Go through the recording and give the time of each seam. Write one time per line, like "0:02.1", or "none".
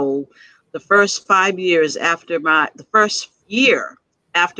0:03.4